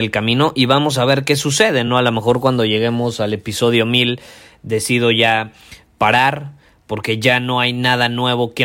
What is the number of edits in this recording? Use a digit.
0